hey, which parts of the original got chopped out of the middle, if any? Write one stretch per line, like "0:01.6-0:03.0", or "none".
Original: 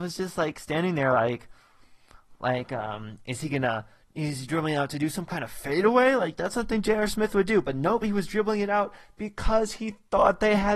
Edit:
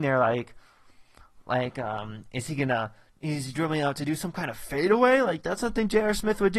none